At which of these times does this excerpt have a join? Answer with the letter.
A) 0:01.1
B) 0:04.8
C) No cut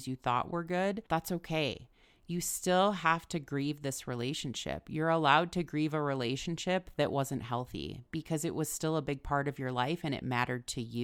A